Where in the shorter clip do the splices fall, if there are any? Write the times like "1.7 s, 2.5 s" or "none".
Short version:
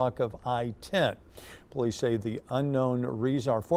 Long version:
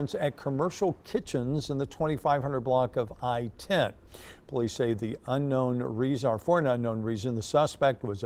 none